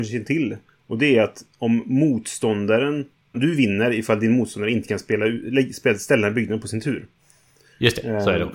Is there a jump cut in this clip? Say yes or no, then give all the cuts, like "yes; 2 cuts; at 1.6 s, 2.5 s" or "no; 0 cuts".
yes; 1 cut; at 3.3 s